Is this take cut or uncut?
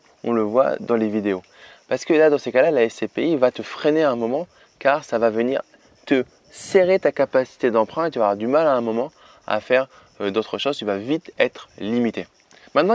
uncut